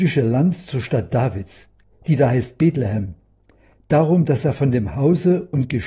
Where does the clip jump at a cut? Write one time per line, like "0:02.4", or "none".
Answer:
none